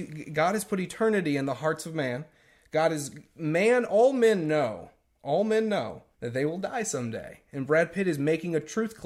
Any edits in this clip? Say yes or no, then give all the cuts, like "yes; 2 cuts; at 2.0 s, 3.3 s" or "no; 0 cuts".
yes; 1 cut; at 6.1 s